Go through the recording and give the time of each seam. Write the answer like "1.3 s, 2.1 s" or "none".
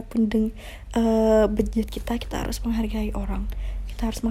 none